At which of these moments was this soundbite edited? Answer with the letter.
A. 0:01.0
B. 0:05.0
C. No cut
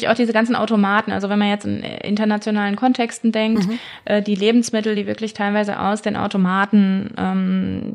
C